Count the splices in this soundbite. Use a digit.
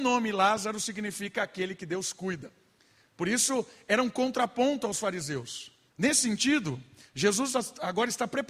1